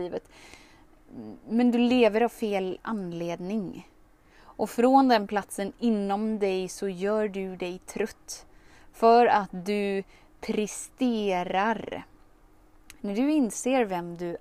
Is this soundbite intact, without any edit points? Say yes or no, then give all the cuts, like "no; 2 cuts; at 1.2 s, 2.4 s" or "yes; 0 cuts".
yes; 0 cuts